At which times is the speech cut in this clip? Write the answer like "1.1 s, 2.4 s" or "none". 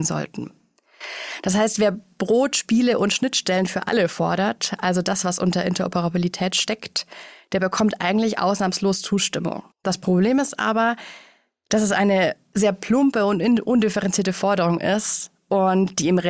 9.7 s